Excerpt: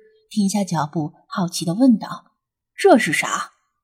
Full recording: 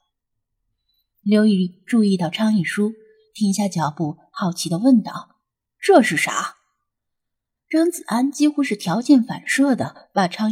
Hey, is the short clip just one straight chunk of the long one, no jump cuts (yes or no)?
yes